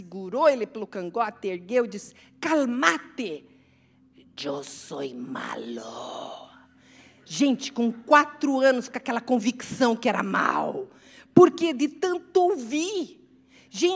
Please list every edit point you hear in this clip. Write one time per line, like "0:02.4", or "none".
none